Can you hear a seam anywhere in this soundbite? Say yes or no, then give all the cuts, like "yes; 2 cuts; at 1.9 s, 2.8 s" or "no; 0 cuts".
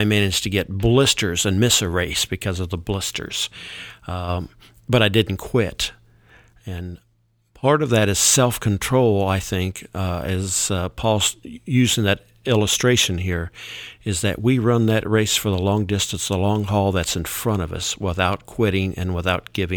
no; 0 cuts